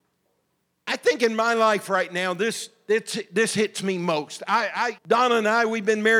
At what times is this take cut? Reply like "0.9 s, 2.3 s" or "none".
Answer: 5.0 s